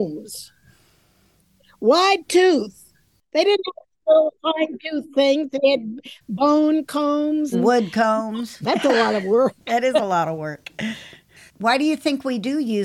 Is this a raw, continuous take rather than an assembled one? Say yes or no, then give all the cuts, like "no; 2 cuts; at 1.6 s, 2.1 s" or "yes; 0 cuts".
no; 2 cuts; at 7.5 s, 8.6 s